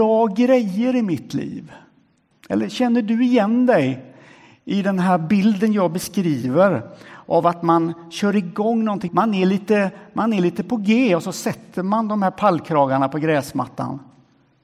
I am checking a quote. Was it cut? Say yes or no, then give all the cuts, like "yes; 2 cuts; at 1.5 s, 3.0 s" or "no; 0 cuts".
yes; 2 cuts; at 2.3 s, 9.1 s